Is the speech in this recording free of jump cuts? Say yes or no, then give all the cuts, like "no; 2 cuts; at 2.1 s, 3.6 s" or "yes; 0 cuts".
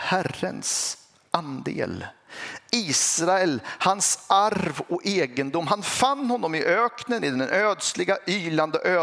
yes; 0 cuts